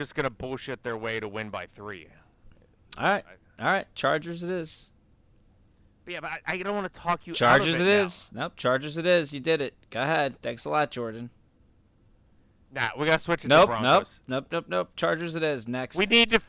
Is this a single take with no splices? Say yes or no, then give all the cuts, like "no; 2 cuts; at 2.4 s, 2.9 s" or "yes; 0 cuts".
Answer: no; 1 cut; at 6.4 s